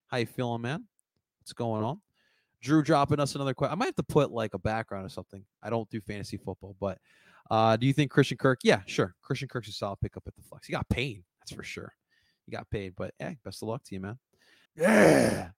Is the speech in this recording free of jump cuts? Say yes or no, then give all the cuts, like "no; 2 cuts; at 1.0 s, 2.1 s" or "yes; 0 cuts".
no; 1 cut; at 14.7 s